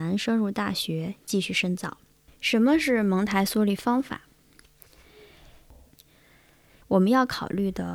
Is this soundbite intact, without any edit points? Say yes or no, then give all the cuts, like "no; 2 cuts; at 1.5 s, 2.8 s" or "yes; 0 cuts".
no; 2 cuts; at 2.3 s, 6.8 s